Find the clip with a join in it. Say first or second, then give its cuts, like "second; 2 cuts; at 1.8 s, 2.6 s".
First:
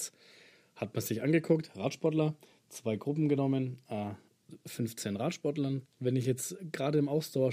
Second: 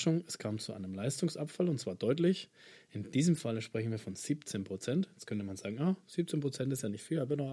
first; 1 cut; at 5.8 s